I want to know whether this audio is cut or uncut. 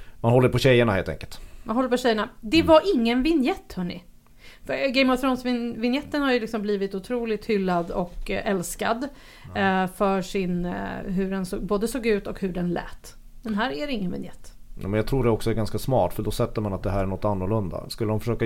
uncut